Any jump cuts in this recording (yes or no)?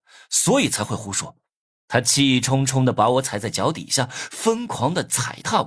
yes